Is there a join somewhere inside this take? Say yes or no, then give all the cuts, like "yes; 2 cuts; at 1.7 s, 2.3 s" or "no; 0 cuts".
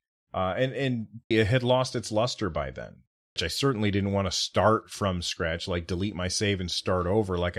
yes; 2 cuts; at 1.3 s, 3.4 s